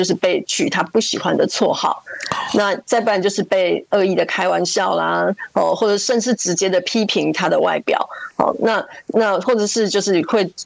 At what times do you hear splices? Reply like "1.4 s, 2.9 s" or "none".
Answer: none

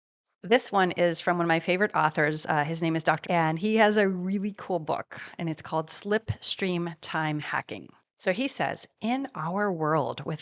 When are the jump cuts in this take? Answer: 3.2 s, 8.0 s

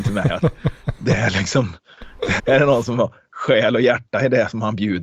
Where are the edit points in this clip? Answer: 2.4 s

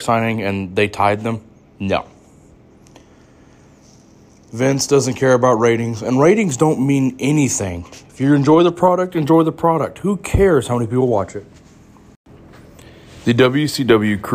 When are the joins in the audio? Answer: none

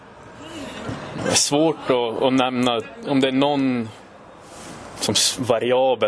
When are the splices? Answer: 1.2 s

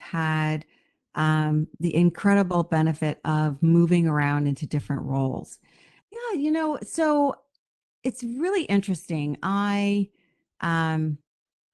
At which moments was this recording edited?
6.0 s

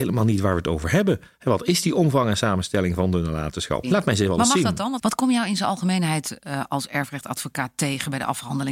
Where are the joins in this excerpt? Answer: 3.8 s, 5.0 s

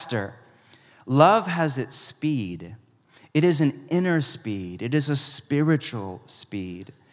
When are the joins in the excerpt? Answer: none

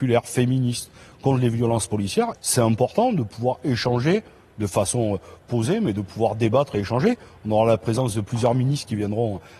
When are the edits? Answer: 2.3 s

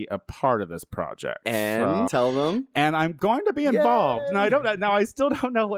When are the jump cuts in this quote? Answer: 2.1 s

